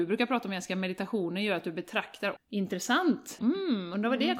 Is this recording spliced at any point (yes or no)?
yes